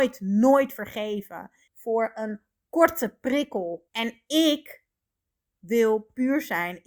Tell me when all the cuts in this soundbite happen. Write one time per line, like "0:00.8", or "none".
0:01.7
0:03.9